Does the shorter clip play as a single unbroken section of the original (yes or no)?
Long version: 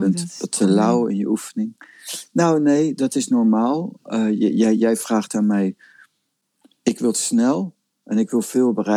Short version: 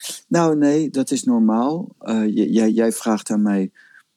yes